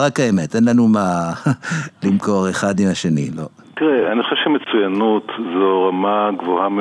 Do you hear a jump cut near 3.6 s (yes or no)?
yes